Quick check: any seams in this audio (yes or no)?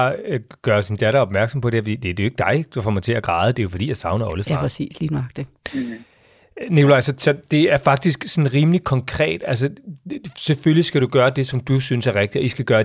no